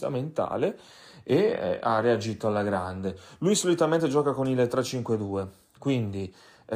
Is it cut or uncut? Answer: uncut